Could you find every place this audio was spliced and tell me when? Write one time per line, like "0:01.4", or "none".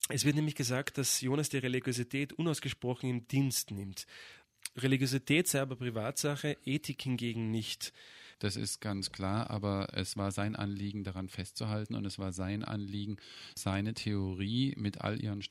0:08.3